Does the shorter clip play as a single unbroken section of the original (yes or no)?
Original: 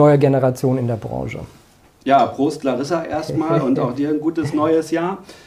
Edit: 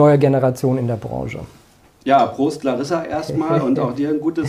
yes